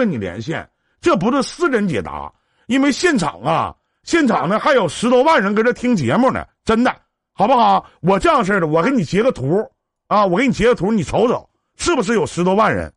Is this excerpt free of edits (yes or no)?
yes